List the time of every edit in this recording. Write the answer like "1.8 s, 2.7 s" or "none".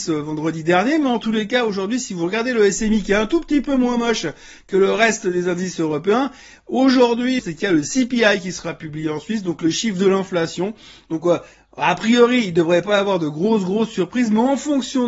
7.4 s